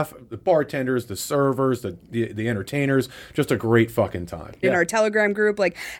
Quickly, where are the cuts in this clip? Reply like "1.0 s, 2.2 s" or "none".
4.6 s